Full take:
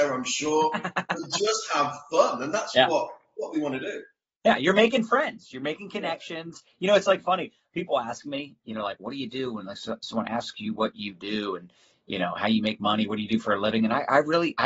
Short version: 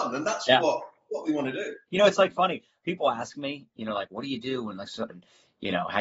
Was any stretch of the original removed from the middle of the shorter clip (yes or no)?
yes